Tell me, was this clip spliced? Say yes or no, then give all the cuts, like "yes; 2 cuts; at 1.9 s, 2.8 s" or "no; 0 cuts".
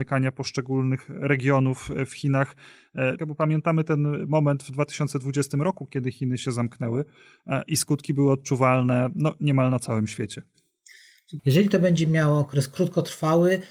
yes; 2 cuts; at 3.2 s, 11.4 s